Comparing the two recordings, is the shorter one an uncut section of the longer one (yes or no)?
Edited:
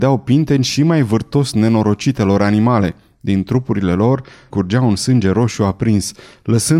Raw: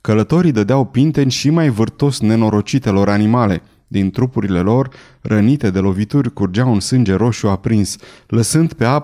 no